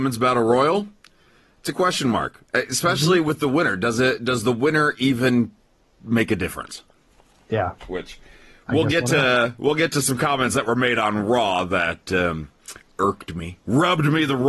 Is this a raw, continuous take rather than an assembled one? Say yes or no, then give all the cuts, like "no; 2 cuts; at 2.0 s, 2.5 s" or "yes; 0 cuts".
no; 1 cut; at 7.8 s